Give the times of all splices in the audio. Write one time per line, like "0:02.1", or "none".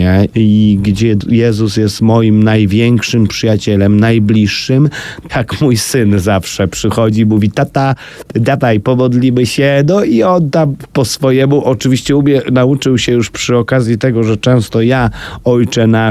0:05.3